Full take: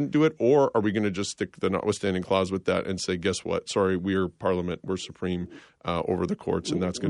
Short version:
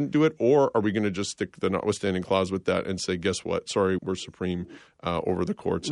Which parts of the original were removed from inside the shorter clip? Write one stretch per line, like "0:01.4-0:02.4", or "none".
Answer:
0:04.0-0:04.8